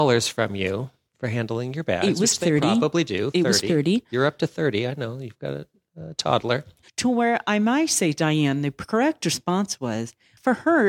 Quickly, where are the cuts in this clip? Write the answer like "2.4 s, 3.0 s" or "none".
6.8 s